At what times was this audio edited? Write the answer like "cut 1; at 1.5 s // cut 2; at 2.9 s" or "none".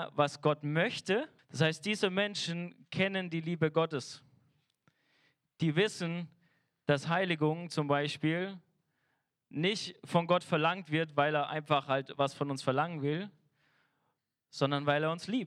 cut 1; at 1.4 s